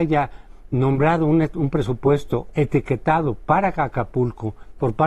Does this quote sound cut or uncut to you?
uncut